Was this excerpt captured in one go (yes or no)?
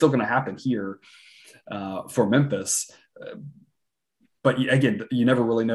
yes